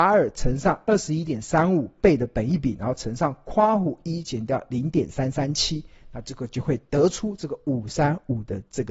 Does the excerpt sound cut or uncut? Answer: uncut